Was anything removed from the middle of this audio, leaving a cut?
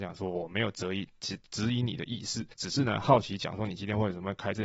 yes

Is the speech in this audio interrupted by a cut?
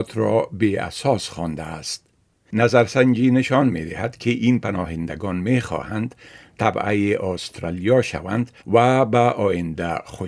yes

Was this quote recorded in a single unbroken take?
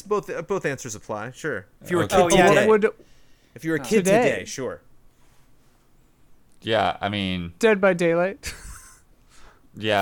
yes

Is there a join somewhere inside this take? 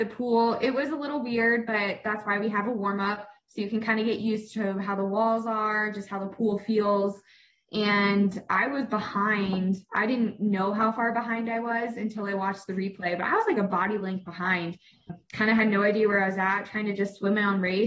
no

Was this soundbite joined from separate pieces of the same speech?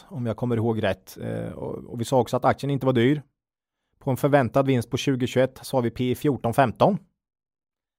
no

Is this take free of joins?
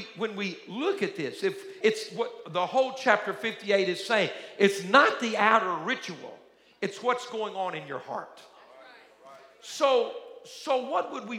no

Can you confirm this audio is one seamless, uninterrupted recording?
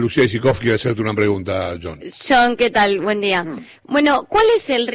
yes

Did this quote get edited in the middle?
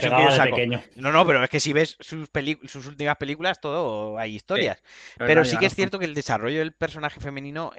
no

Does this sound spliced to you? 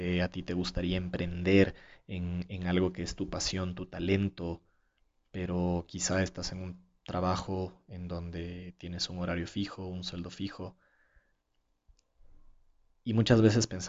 no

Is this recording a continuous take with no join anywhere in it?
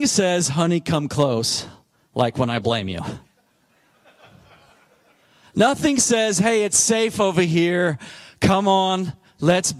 yes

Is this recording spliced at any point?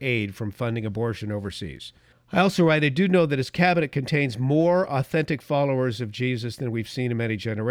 yes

